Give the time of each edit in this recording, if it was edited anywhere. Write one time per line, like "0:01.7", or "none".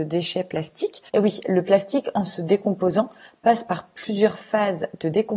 0:01.1